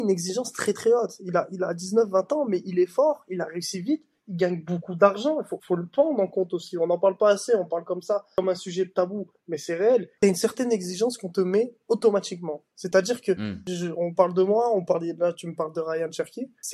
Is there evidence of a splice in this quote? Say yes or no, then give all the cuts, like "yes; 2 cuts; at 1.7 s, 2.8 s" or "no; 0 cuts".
yes; 2 cuts; at 5.6 s, 10.2 s